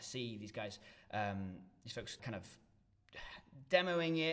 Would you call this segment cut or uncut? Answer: cut